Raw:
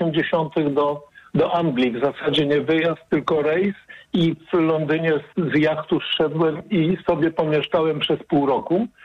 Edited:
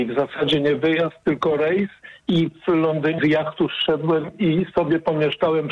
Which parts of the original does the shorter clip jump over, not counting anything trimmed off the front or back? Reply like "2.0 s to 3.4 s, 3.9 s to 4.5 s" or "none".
5.0 s to 5.5 s